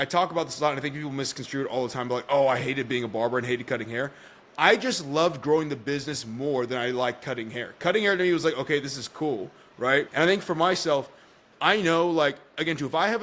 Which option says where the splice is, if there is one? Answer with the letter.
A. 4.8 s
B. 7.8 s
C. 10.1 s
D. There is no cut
C